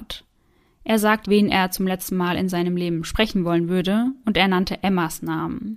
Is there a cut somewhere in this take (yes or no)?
yes